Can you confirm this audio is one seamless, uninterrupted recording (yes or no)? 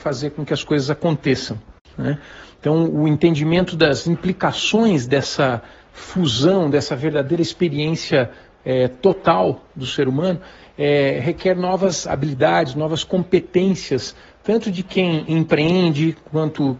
no